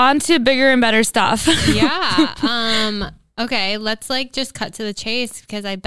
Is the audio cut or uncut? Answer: uncut